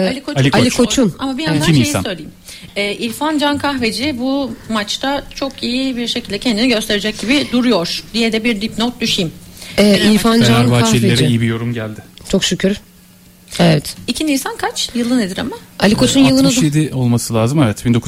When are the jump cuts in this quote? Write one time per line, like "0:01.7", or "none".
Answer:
none